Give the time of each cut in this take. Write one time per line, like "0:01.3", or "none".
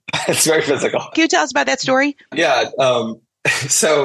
0:01.1
0:02.3